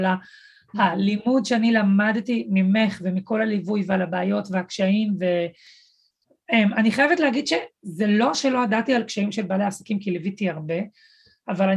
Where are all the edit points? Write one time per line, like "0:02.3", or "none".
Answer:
none